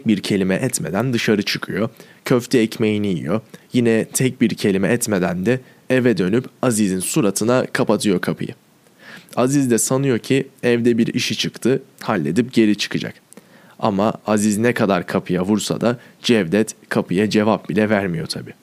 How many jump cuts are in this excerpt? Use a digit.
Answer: 0